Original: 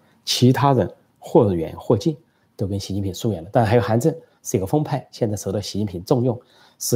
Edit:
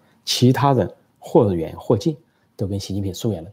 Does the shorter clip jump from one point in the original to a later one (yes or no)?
no